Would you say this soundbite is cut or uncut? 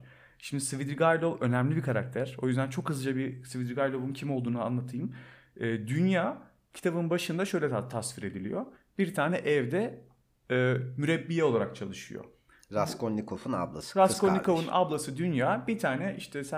uncut